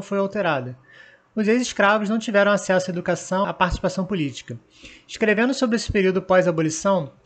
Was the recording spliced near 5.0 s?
no; 1 cut; at 3.4 s

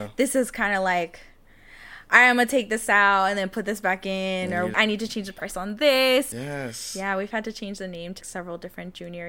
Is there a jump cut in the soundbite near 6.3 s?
yes; 3 cuts; at 4.7 s, 6.3 s, 8.2 s

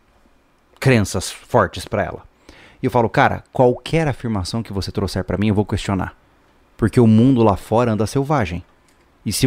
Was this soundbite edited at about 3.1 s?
no; 0 cuts

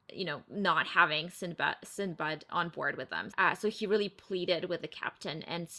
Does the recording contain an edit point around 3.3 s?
yes; 1 cut; at 3.3 s

